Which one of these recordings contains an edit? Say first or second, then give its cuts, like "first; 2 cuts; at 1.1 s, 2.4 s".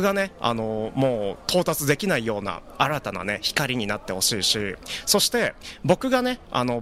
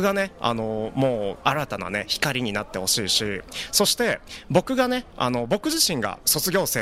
second; 1 cut; at 1.4 s